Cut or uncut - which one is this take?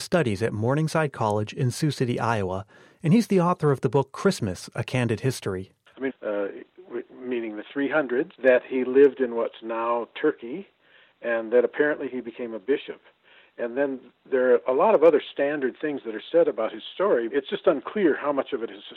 cut